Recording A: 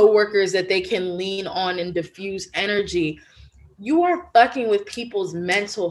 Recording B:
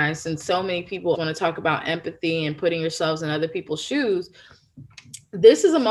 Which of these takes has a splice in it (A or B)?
B